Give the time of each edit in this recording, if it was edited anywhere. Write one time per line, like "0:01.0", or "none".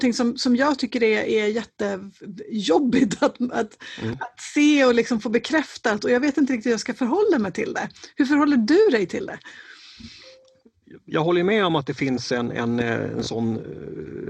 none